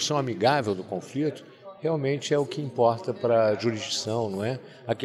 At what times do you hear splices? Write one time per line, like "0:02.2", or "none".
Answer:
none